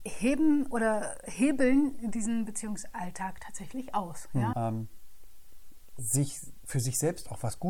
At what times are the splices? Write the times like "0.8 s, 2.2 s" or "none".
4.5 s